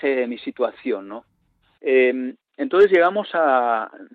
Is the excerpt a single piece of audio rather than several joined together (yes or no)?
no